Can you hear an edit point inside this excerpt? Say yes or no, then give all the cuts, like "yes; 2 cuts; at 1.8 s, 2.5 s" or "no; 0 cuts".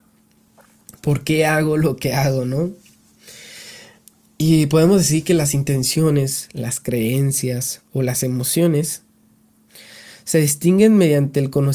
no; 0 cuts